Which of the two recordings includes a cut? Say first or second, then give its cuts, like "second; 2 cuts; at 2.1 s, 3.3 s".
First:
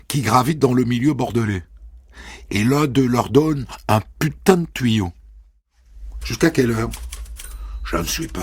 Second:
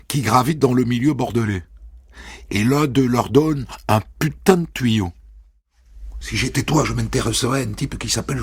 first; 1 cut; at 6.2 s